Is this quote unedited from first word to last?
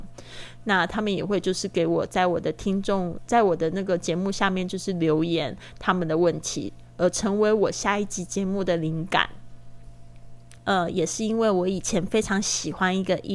no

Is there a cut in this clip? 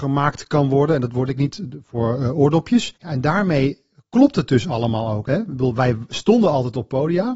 yes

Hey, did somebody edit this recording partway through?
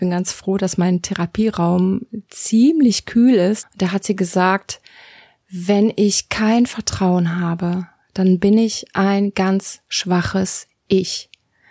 yes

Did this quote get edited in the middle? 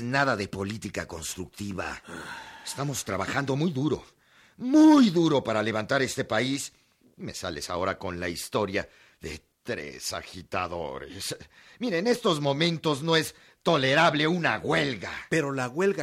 no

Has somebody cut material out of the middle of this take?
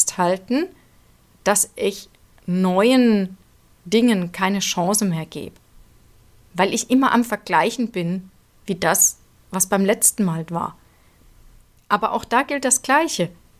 no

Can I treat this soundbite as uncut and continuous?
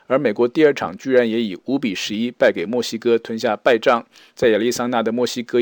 yes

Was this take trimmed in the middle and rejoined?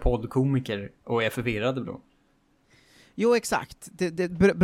no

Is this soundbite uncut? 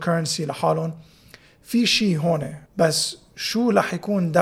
no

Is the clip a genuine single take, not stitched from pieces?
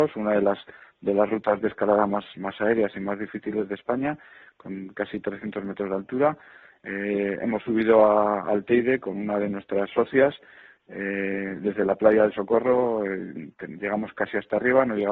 yes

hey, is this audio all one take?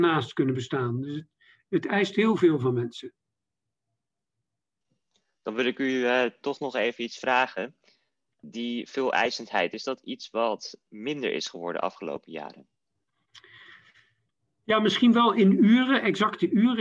yes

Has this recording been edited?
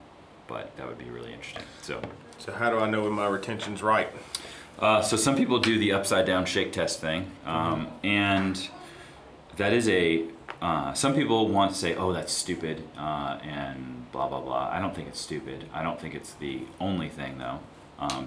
no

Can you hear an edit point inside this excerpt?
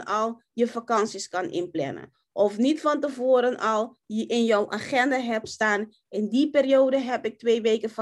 no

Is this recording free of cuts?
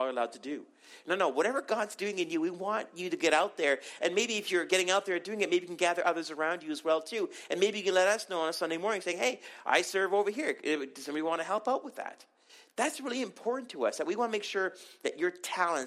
yes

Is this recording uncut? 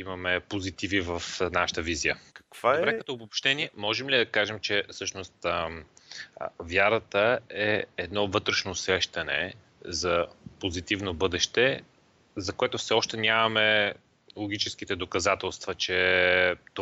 no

